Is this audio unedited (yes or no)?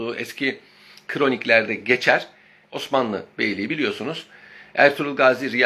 no